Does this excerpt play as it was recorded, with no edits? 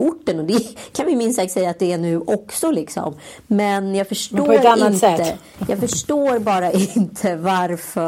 yes; 0 cuts

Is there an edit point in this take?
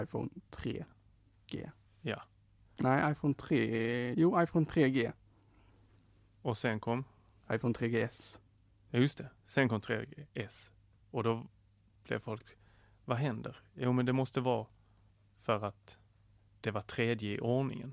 no; 0 cuts

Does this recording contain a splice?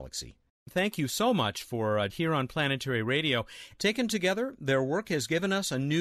yes; 2 cuts; at 2.1 s, 3.8 s

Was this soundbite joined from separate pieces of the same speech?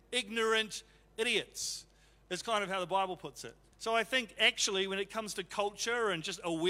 yes; 1 cut; at 3.7 s

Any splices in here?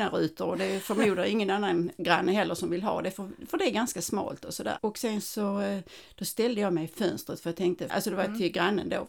yes; 2 cuts; at 4.8 s, 7.9 s

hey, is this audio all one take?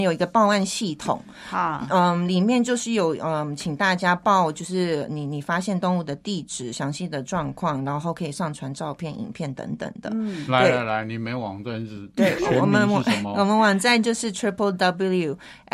yes; 0 cuts

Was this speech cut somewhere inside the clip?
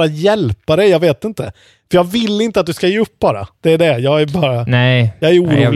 no; 0 cuts

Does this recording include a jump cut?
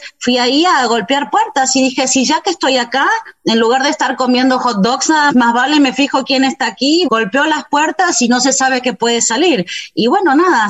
yes; 2 cuts; at 5.3 s, 7.1 s

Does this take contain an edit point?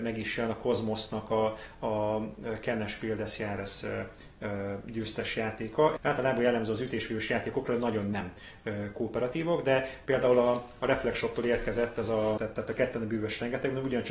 yes; 2 cuts; at 6.0 s, 12.4 s

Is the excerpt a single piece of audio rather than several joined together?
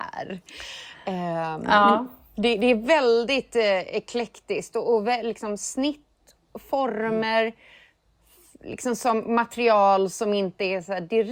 yes; 0 cuts

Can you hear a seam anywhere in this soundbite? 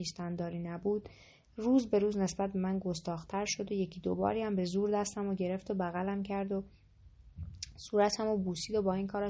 no; 0 cuts

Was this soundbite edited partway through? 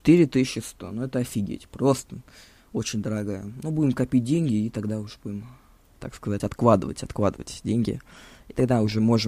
no; 0 cuts

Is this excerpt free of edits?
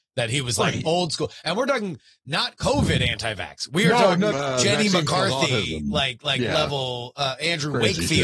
no; 1 cut; at 4.3 s

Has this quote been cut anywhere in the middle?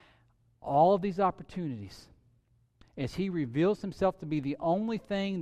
yes; 1 cut; at 2.8 s

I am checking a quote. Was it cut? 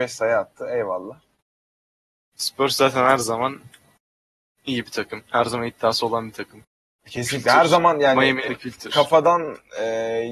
yes; 1 cut; at 8.5 s

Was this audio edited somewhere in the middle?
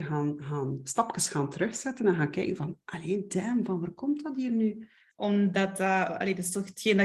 yes; 1 cut; at 5.1 s

